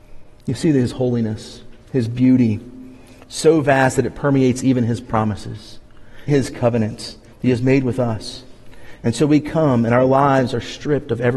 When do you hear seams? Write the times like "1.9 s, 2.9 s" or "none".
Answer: 6.3 s